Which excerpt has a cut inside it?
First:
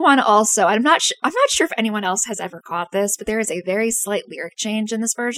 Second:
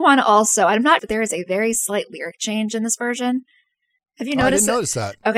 second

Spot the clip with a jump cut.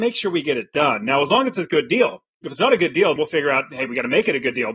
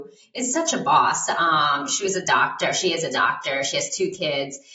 first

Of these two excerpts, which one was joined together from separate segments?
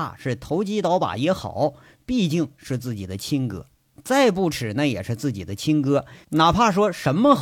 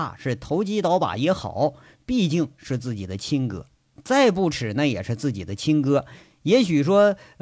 first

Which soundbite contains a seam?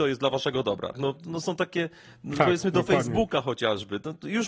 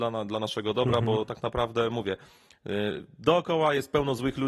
first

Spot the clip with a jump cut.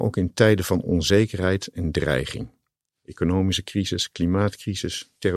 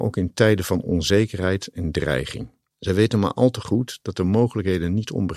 second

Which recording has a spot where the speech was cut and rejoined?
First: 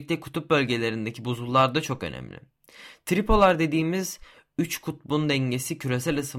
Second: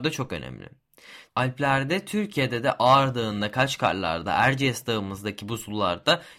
second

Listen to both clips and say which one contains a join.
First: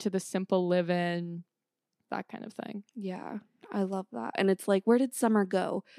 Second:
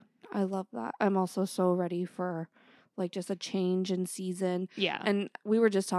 first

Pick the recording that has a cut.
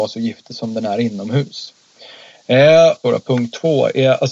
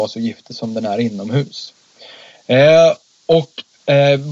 first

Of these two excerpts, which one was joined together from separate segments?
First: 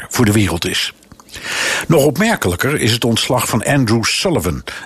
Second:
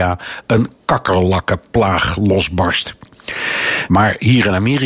second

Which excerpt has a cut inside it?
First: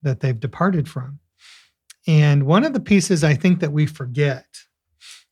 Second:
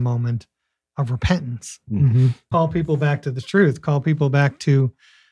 second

